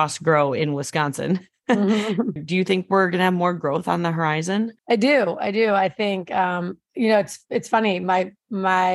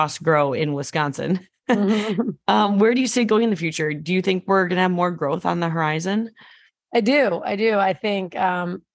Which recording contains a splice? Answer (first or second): first